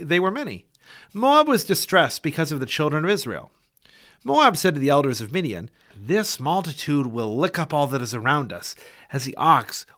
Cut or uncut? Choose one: cut